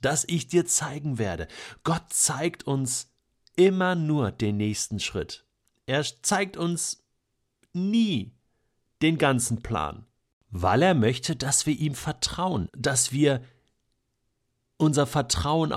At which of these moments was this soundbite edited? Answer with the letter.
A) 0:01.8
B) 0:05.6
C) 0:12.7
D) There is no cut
C